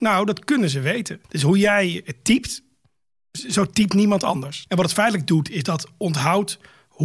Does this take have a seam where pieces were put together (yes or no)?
yes